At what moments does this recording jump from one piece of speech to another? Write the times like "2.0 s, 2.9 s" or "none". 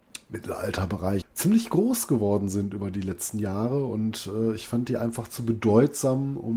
1.2 s